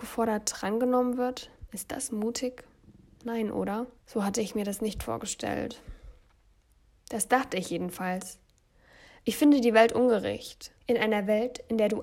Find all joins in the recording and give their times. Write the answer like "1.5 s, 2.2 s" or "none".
4.0 s, 10.8 s